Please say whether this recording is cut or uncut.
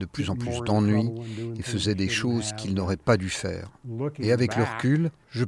uncut